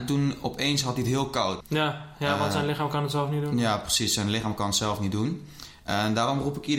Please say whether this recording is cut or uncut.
cut